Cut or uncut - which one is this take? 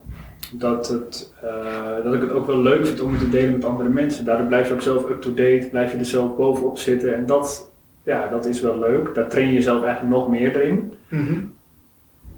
uncut